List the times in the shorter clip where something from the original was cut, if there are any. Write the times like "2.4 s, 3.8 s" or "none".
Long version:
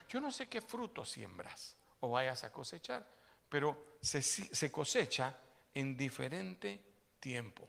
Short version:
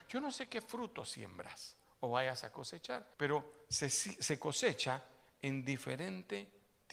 3.1 s